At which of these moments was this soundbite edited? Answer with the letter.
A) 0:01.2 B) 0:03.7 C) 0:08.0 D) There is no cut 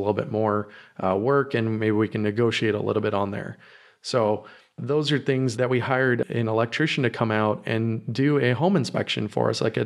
D